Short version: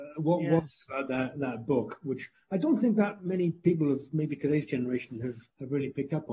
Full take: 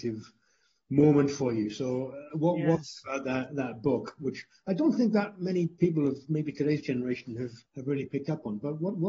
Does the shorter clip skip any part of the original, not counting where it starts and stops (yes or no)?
no